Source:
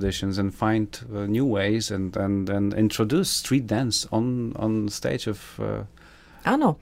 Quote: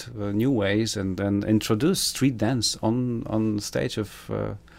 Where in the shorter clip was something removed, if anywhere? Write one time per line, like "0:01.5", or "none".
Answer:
0:01.2